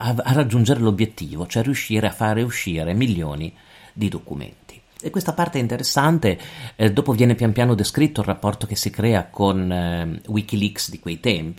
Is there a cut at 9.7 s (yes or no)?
no